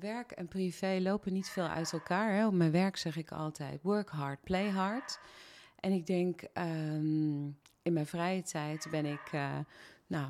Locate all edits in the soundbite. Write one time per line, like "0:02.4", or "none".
none